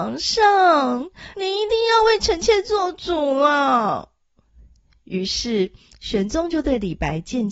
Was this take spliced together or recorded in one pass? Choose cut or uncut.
cut